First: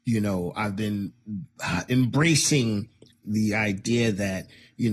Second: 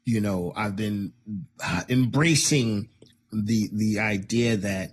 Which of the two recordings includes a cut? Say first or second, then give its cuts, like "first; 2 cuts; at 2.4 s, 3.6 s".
first; 1 cut; at 3.2 s